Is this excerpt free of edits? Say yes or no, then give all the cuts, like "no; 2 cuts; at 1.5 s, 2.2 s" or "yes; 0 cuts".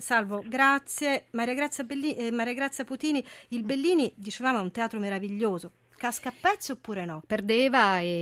no; 1 cut; at 7.2 s